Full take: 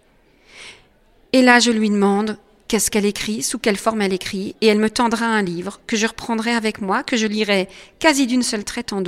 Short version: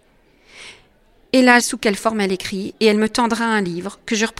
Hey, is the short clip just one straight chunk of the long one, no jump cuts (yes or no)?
no